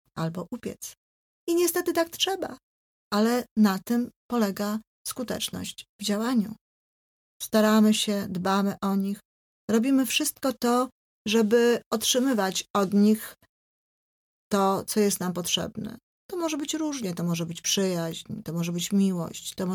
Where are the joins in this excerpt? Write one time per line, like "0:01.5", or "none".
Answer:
0:03.0
0:07.3